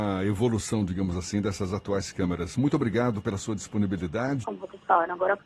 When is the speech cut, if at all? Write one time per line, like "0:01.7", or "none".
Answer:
0:02.5
0:04.4